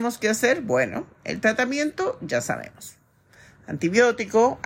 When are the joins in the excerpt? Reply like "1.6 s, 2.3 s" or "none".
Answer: none